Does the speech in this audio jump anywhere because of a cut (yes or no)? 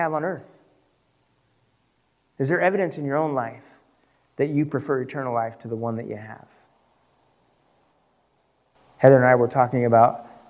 no